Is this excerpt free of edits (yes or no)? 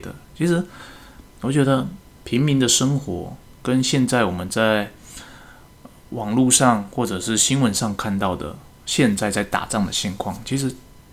yes